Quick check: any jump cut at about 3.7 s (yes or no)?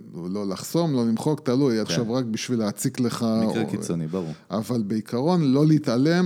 no